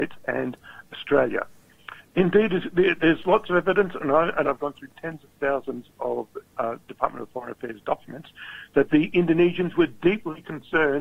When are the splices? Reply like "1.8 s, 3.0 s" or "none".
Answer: 2.0 s, 4.4 s